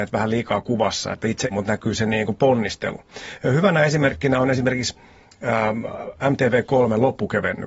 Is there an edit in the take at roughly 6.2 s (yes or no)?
no